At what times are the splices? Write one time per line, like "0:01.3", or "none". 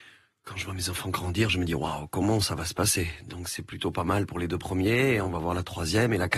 none